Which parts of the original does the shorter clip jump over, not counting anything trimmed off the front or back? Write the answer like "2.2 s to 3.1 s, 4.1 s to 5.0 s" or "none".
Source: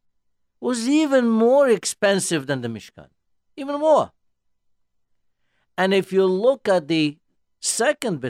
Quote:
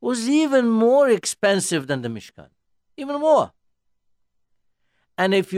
none